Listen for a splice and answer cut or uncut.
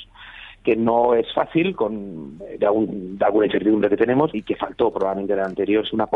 cut